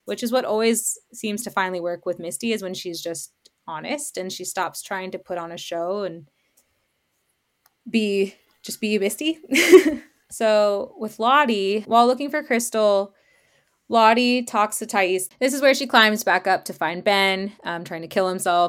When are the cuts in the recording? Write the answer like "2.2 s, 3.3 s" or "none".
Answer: 11.8 s, 15.3 s